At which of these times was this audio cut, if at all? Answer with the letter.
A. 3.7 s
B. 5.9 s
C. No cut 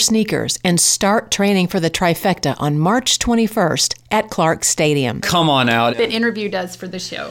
B